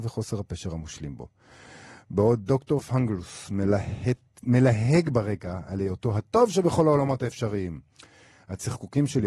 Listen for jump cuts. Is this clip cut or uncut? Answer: uncut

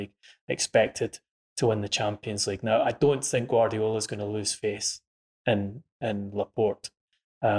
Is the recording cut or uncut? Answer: uncut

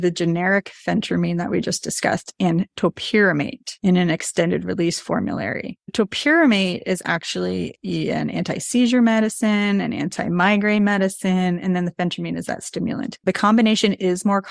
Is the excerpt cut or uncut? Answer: cut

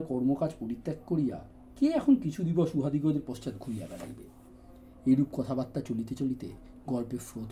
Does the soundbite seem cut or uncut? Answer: cut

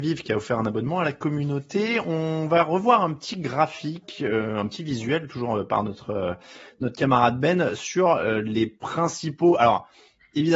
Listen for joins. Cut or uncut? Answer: uncut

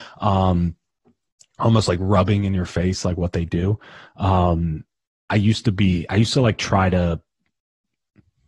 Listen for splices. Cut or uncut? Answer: uncut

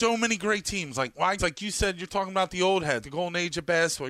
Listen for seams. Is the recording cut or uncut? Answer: cut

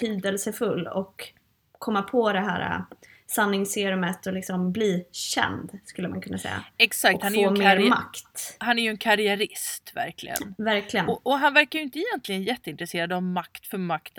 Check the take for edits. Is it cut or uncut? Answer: uncut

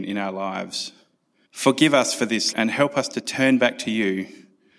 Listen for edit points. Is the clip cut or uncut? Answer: cut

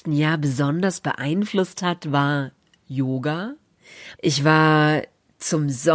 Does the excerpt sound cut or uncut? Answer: cut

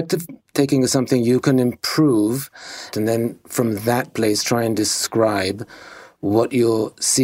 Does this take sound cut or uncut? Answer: cut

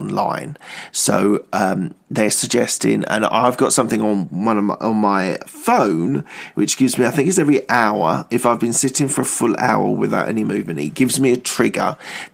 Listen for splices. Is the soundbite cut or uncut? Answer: uncut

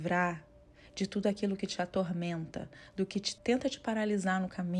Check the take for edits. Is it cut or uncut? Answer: cut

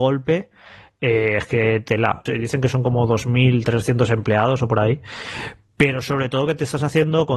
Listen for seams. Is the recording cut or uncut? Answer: cut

